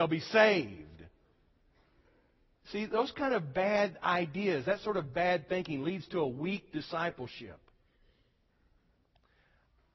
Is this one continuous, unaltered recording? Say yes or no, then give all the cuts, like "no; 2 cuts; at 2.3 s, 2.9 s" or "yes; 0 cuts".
yes; 0 cuts